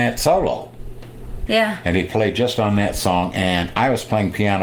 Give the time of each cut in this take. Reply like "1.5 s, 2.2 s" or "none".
1.5 s